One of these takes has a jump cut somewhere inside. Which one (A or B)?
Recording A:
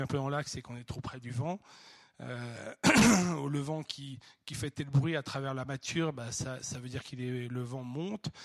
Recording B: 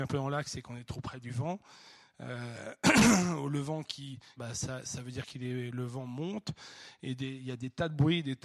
B